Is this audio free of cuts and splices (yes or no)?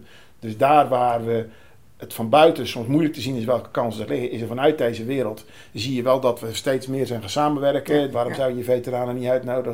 no